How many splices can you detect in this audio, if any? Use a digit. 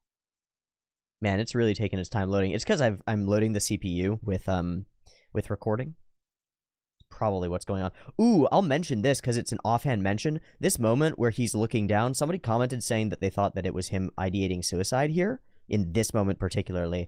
1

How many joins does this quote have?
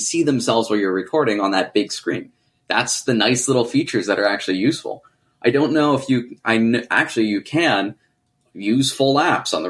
0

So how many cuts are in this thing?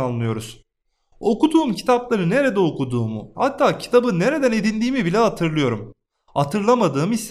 1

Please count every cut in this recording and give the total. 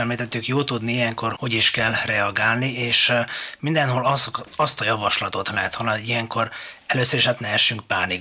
1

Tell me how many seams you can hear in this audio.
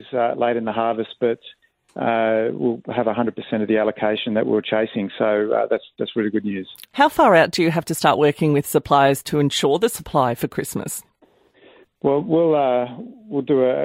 1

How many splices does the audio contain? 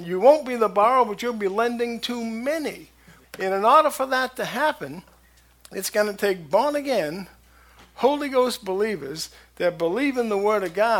1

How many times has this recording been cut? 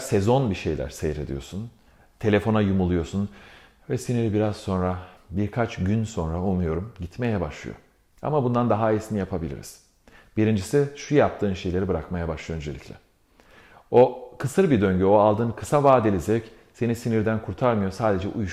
1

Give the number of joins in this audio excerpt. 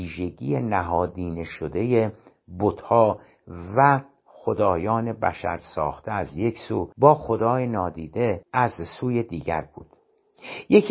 2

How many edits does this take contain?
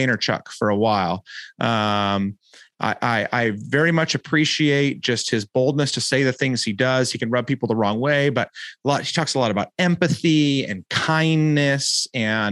0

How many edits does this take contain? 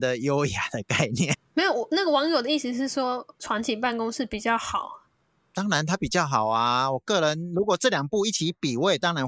1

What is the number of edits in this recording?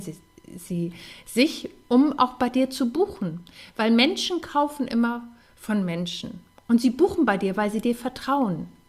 0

